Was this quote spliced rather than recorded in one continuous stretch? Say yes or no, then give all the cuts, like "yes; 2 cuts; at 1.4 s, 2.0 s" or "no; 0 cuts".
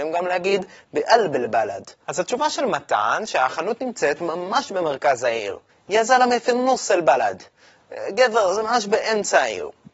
yes; 1 cut; at 2.0 s